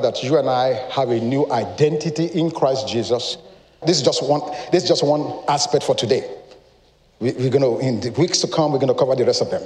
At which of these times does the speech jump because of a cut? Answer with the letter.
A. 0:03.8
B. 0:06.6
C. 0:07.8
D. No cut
A